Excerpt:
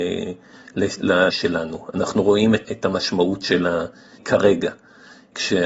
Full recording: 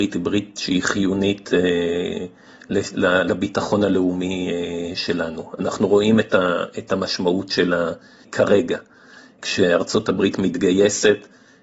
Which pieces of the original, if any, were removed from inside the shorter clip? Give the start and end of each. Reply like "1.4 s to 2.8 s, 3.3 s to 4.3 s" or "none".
3.2 s to 5.0 s, 6.3 s to 6.7 s